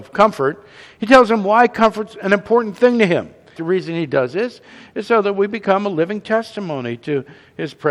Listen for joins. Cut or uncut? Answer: cut